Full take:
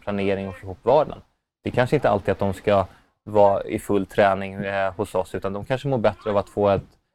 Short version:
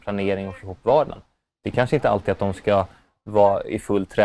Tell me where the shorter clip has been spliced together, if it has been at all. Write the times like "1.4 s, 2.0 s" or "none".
none